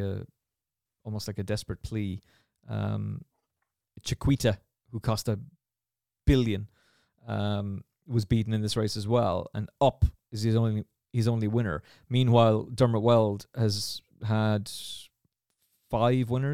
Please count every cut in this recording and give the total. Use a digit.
0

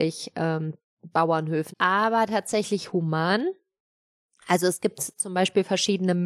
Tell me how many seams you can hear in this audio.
1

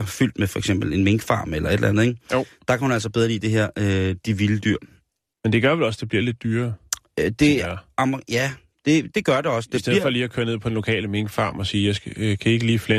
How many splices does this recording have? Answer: 2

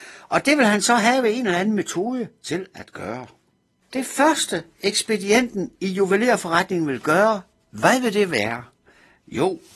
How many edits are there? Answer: 1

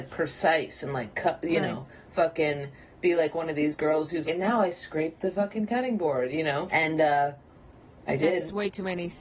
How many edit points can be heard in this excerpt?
2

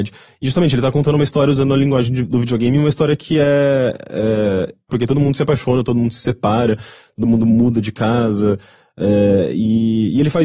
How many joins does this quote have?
1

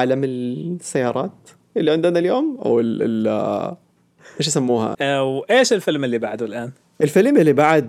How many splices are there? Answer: 1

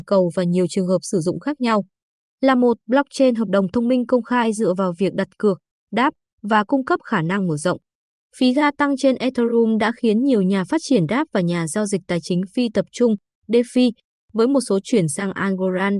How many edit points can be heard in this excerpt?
2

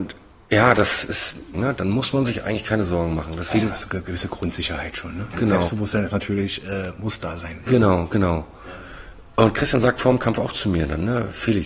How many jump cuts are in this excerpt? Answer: 2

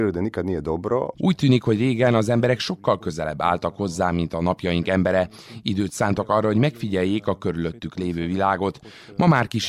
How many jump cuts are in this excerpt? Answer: 1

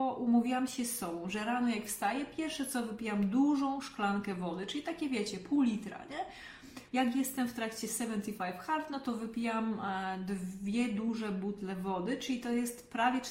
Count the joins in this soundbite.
1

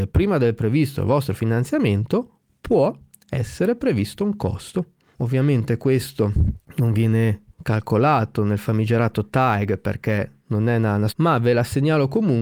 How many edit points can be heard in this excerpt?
2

